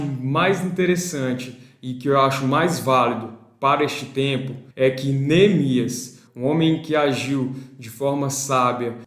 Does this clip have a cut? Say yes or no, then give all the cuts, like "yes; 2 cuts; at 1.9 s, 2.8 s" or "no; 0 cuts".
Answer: yes; 2 cuts; at 4.7 s, 6.3 s